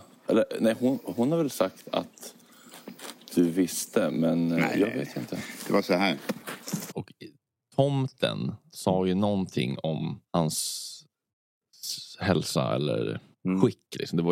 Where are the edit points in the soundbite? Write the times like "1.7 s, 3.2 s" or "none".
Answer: 6.9 s, 10.3 s